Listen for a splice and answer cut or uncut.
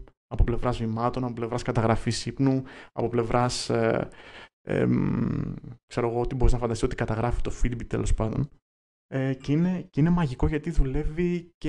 uncut